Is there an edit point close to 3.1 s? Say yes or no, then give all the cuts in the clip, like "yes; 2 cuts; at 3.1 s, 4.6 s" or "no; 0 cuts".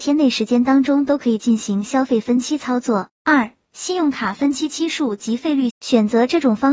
yes; 2 cuts; at 3.1 s, 5.7 s